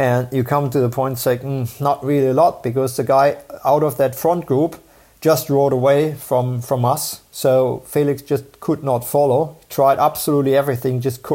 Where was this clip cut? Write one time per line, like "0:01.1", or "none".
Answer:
none

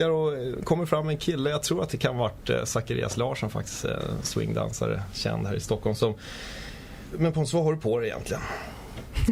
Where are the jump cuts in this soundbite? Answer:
0:07.1

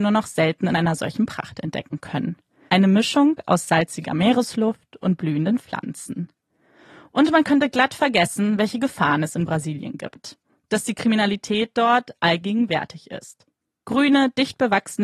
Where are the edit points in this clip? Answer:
0:02.7
0:13.8

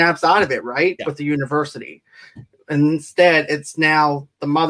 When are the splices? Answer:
0:01.0

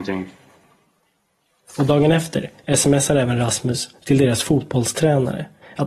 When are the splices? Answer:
none

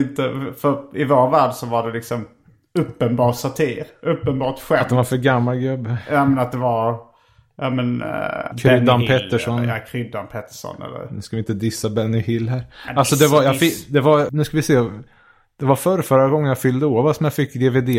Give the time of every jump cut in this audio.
0:08.5
0:14.3

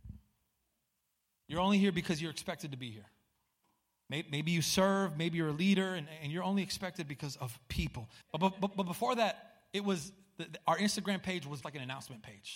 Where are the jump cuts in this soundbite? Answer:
0:08.2
0:11.6

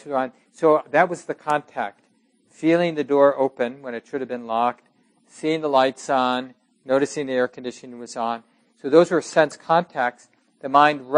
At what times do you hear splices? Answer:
none

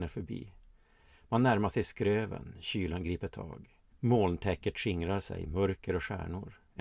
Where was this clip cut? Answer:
0:03.9

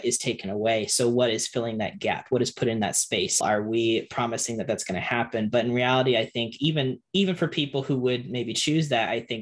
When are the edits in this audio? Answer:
0:03.4

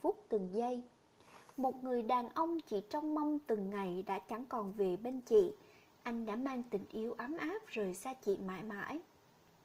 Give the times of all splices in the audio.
none

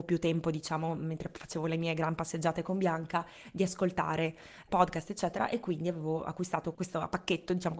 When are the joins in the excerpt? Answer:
0:04.7
0:06.7

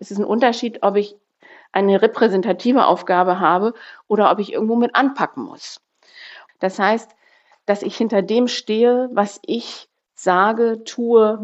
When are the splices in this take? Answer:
0:06.5

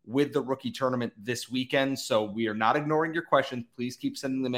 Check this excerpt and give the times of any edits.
none

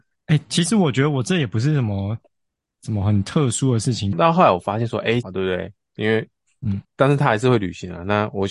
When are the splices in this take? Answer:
0:04.1
0:05.2
0:06.8

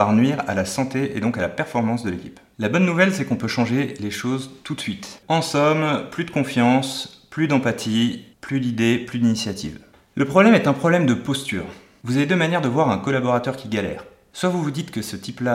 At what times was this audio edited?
0:05.2
0:08.3

